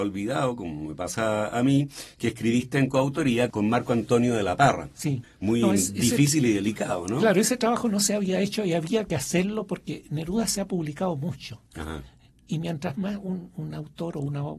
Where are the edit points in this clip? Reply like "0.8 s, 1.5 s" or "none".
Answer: 5.2 s